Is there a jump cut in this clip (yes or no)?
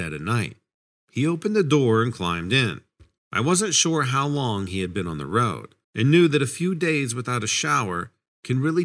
yes